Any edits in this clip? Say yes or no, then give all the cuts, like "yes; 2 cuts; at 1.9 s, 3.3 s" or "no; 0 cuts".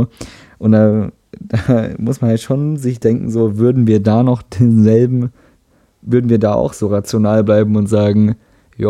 no; 0 cuts